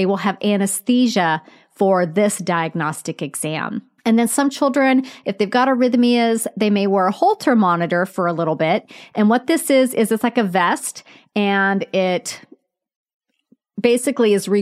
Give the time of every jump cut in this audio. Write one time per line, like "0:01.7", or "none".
0:04.0